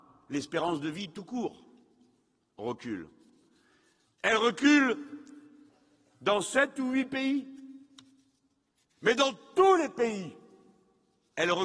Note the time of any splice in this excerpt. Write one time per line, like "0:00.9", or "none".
none